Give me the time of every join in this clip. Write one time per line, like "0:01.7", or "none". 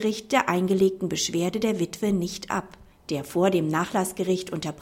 0:02.9